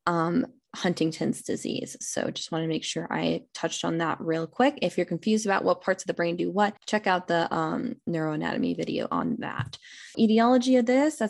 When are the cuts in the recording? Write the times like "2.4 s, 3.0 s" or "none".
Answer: 6.8 s, 10.1 s